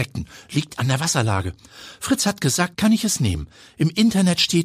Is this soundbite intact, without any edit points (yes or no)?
no